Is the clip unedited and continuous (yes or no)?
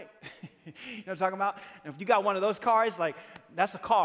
yes